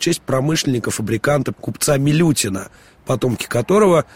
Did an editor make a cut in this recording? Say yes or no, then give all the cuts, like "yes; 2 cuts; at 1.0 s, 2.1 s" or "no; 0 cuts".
yes; 1 cut; at 1.5 s